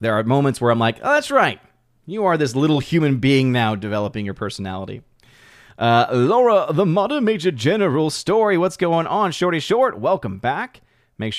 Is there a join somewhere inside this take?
no; 0 cuts

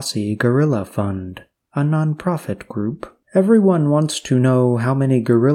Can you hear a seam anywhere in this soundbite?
yes; 1 cut; at 3.2 s

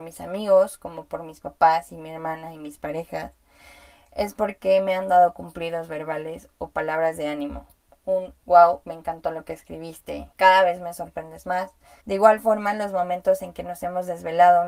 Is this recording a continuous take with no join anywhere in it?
no; 2 cuts; at 10.3 s, 12.0 s

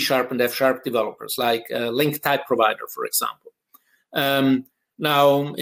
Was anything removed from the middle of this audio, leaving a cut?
no; 0 cuts

